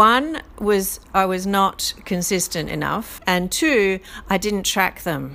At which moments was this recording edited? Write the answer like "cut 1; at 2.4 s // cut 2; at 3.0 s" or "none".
cut 1; at 3.2 s